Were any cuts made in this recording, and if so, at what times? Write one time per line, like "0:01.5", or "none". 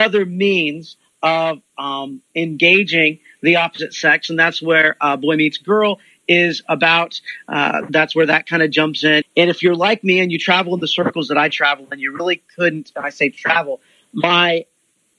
0:09.2